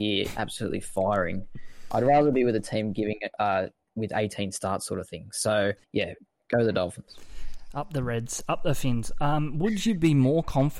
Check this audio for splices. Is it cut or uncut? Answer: cut